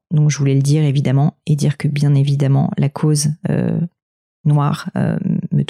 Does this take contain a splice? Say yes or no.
no